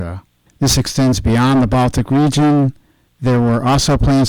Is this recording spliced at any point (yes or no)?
no